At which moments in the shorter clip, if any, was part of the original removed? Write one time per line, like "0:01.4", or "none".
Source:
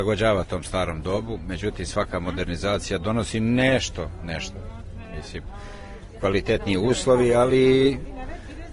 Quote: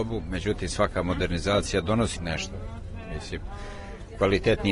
0:02.2